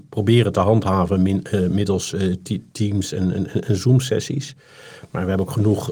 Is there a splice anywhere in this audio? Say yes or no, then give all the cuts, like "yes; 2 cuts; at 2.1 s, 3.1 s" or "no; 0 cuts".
no; 0 cuts